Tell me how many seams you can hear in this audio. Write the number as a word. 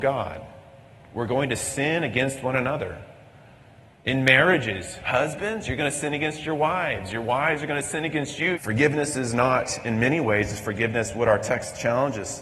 one